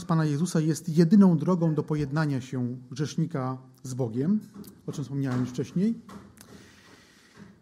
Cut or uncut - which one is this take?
uncut